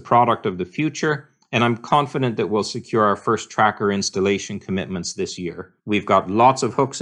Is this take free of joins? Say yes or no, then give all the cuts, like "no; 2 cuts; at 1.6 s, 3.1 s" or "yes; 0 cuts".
no; 1 cut; at 5.8 s